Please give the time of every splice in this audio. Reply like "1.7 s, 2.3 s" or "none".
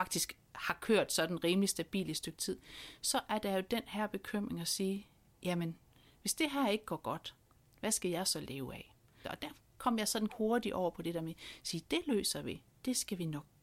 9.2 s, 10.3 s